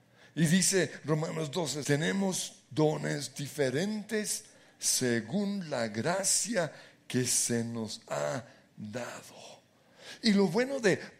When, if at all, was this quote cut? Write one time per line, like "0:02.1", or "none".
0:01.8